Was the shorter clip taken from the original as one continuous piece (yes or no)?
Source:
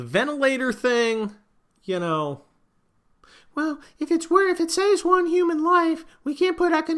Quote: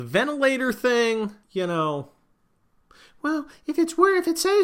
no